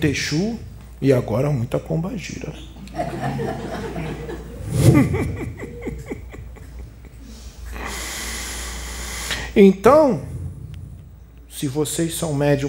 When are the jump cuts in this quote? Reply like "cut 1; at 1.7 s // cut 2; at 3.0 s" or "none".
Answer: none